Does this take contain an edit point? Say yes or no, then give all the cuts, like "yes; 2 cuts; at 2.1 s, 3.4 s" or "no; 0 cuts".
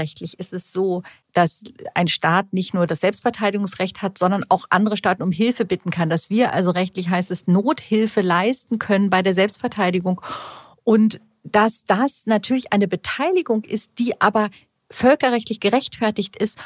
no; 0 cuts